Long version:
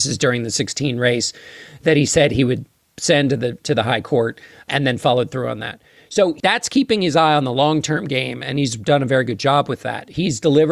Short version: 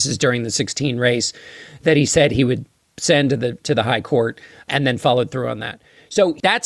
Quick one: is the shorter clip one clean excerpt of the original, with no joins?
yes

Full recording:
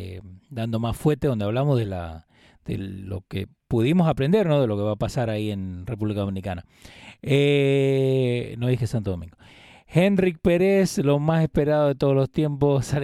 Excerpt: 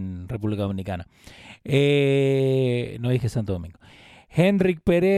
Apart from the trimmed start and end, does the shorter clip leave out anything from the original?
no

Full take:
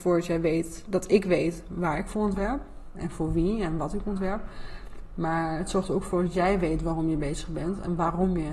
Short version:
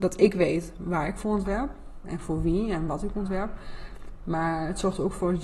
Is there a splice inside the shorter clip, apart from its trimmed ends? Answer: no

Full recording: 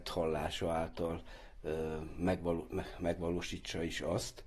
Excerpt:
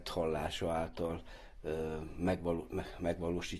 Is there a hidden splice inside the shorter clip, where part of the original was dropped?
no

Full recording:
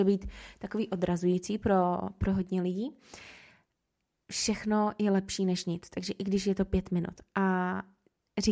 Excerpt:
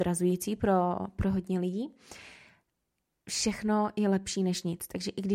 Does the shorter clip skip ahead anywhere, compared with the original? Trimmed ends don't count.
no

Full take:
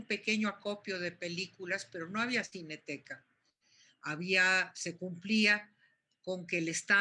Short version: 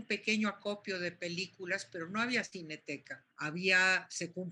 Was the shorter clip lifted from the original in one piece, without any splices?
no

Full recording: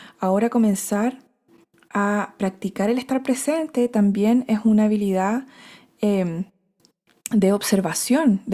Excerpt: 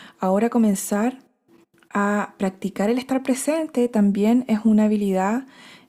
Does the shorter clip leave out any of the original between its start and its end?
no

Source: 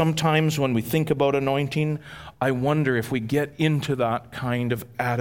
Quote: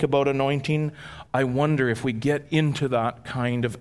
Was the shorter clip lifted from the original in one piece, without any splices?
yes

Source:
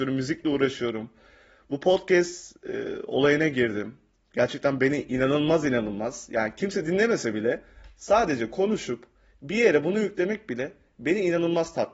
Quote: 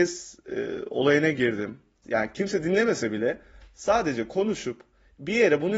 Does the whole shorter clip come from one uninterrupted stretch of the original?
no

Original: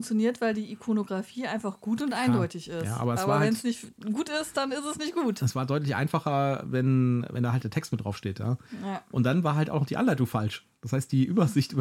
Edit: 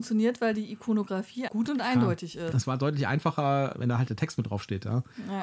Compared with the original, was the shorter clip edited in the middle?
yes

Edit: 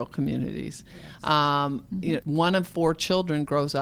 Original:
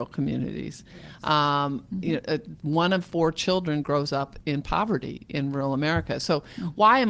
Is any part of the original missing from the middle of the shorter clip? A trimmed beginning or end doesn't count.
yes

